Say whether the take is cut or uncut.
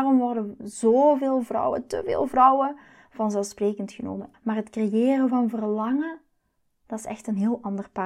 cut